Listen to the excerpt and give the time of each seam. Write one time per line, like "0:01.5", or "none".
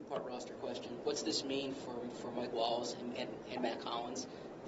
0:03.1